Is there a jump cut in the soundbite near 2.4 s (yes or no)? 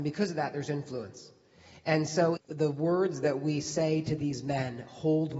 yes